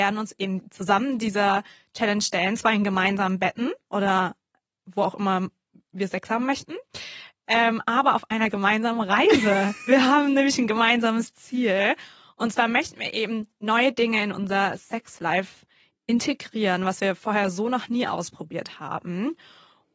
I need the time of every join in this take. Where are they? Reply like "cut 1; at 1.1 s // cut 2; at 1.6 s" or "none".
none